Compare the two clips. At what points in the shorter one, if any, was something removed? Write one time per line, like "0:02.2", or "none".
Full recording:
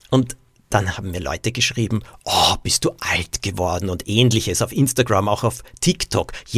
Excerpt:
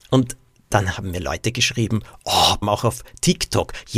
0:02.6